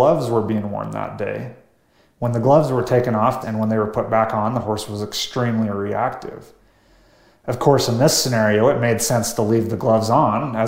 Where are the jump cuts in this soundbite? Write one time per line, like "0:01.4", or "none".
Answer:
0:03.4